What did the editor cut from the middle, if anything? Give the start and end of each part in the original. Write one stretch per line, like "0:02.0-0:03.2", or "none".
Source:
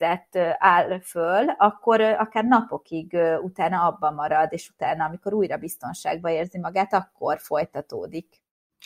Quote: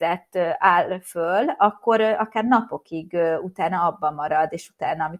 none